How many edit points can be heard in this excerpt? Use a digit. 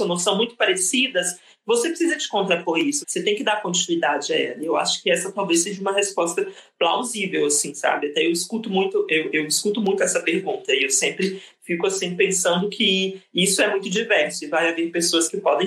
1